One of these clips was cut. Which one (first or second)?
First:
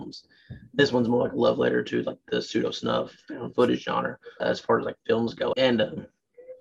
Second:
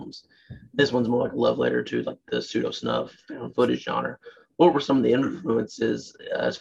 first